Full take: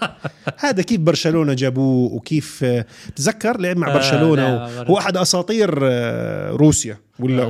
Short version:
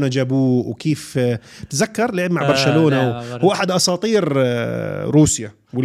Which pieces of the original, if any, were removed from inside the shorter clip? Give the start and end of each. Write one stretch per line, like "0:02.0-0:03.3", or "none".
none